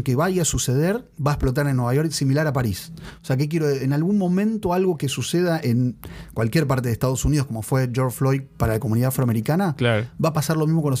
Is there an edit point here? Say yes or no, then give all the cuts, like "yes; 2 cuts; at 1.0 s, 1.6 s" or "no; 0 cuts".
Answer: no; 0 cuts